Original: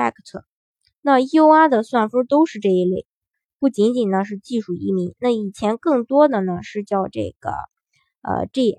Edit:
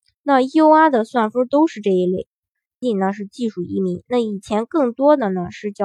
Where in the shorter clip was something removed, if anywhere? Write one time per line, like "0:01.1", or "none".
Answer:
0:02.8